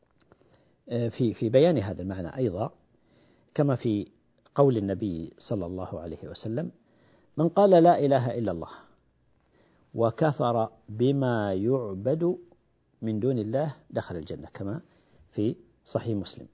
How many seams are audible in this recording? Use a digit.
1